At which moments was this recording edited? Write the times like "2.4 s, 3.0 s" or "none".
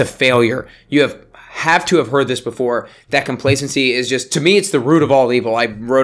none